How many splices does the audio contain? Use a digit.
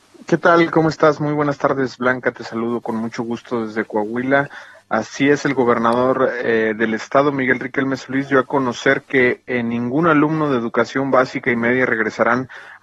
0